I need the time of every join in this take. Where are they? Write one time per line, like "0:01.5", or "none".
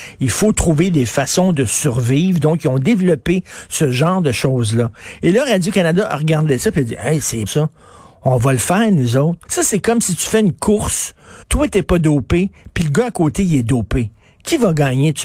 0:07.5
0:09.4
0:11.4

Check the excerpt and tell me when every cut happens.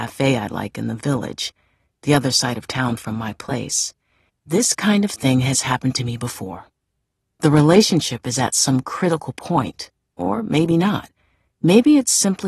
0:04.3

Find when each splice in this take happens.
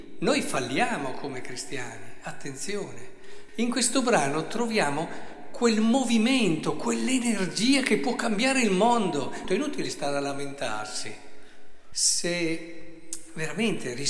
0:03.5
0:09.4
0:11.9

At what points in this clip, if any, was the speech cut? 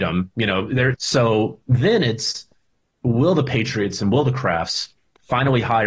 0:00.9

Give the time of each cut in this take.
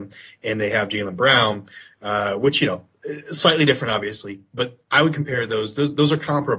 none

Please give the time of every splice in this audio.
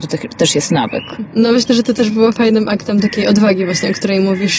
none

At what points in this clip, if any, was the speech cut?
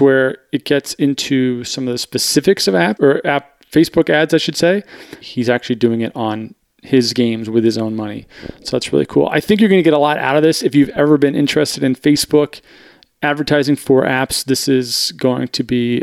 0:03.0
0:05.2

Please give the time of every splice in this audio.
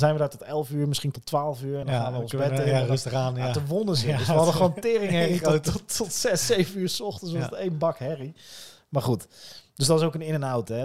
none

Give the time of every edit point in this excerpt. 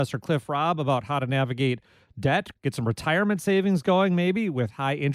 0:02.5

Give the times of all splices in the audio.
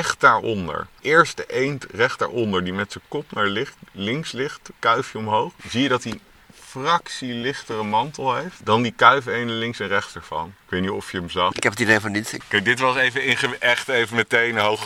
0:05.6

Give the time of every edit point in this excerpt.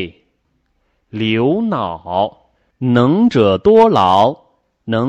0:02.7

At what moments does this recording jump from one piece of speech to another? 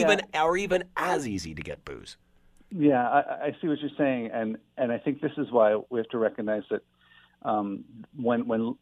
none

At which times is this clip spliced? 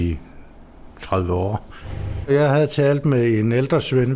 0:02.2

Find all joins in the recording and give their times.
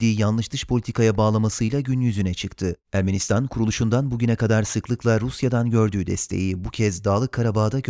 0:02.8

